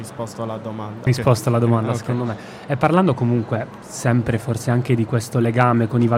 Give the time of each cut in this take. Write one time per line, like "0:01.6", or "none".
0:01.1